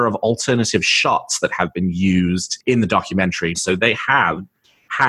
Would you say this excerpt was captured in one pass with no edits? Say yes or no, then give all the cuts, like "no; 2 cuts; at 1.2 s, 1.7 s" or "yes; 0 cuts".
no; 1 cut; at 3.5 s